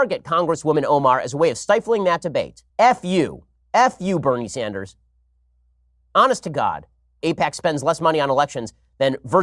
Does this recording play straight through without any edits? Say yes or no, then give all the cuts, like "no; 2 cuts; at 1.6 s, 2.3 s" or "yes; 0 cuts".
no; 2 cuts; at 2.7 s, 7.2 s